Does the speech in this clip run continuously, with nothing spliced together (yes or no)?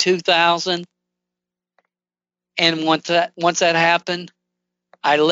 yes